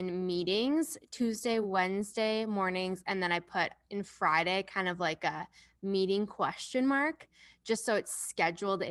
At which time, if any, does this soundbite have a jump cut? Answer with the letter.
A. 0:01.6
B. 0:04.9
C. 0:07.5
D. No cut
D